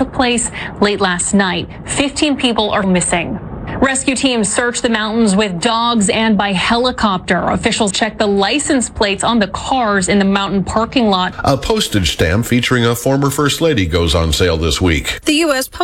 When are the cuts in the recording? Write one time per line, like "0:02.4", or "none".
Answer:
0:02.8
0:07.9
0:11.3